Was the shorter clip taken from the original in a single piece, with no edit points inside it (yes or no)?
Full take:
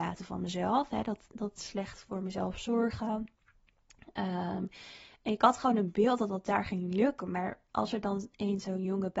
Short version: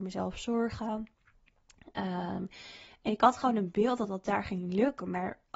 yes